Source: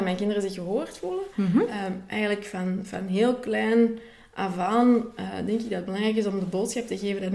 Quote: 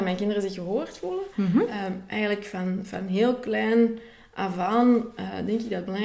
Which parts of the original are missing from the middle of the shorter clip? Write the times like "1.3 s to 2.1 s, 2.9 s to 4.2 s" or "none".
none